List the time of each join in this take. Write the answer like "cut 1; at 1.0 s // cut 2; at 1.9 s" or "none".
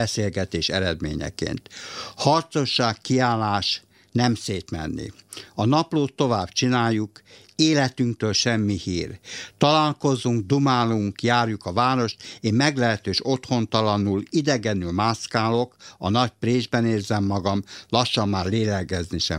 none